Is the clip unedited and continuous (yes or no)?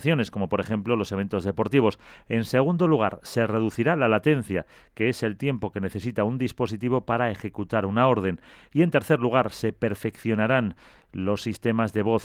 yes